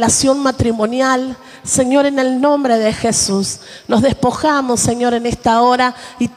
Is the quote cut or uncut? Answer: uncut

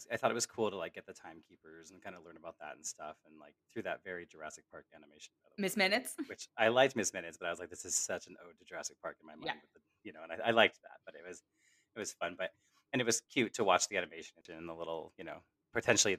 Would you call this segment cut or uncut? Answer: uncut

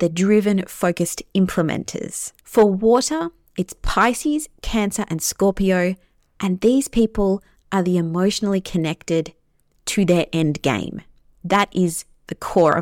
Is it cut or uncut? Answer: cut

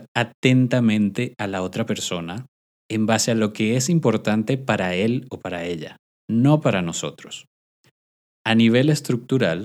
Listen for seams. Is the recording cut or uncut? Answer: cut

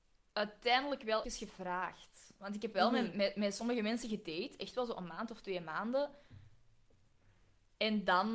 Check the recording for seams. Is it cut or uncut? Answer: cut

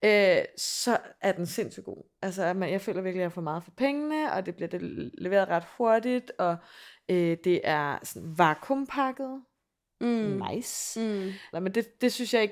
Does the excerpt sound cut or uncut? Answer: cut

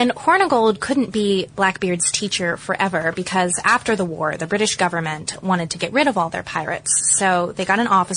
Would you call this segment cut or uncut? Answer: uncut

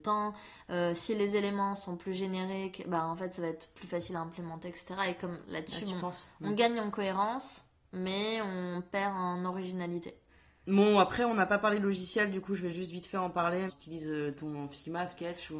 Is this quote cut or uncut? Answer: uncut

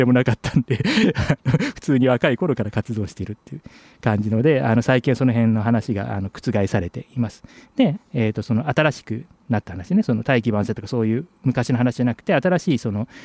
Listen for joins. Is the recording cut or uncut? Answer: cut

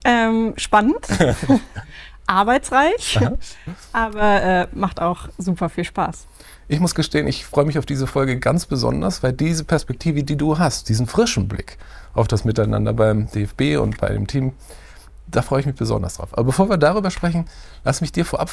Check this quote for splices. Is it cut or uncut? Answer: uncut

